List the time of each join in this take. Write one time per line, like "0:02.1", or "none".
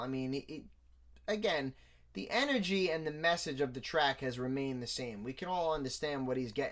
none